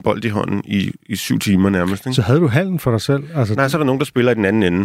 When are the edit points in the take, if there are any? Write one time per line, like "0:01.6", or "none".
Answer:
none